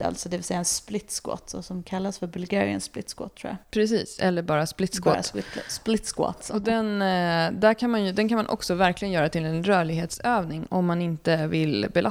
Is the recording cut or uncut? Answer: uncut